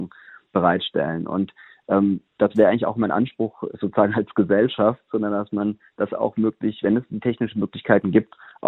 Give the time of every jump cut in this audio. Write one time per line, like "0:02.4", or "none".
0:02.3
0:05.1